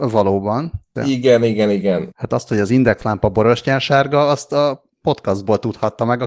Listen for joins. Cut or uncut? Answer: cut